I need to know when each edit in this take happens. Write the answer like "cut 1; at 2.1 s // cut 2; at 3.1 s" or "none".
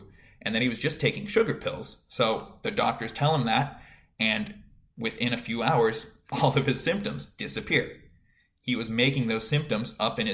none